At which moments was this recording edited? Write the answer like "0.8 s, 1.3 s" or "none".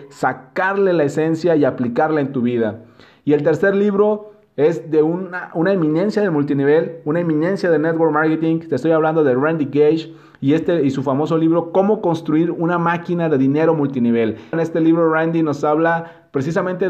14.5 s